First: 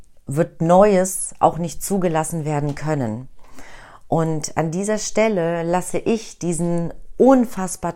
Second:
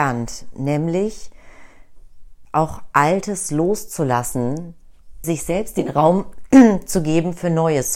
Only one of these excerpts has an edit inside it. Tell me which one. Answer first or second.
second